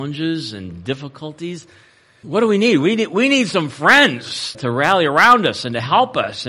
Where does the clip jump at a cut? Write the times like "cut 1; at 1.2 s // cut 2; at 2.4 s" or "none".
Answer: cut 1; at 2.2 s // cut 2; at 4.5 s